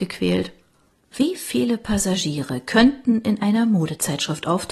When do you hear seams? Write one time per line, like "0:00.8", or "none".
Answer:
0:00.9

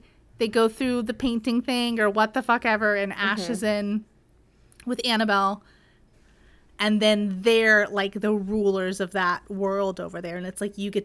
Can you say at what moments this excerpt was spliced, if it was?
0:06.1

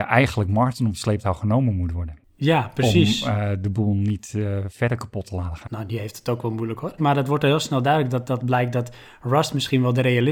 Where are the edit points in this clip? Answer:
0:05.7
0:07.0

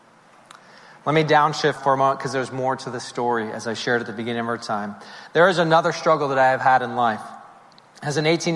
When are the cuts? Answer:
0:01.8

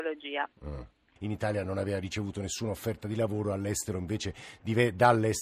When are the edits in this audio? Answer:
0:01.2

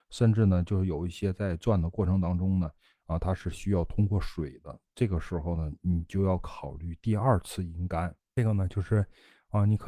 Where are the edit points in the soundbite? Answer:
none

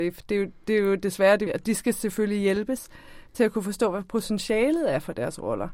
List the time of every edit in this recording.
0:01.5

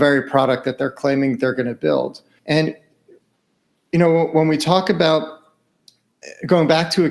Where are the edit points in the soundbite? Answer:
0:02.4

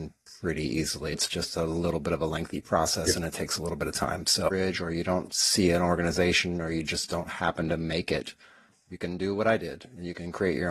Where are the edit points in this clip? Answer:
0:01.1

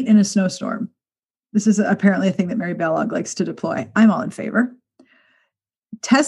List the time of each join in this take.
none

